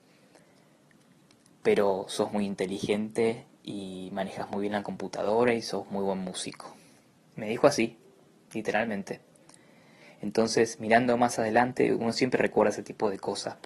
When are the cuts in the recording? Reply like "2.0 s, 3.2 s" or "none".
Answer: none

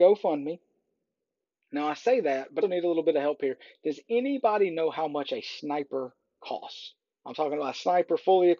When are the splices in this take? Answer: 2.6 s

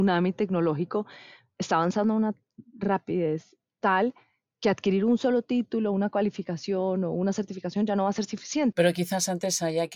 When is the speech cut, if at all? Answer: 3.6 s, 8.7 s

